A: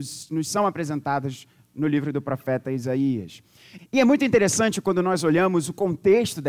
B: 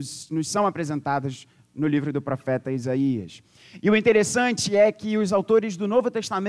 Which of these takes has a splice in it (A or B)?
A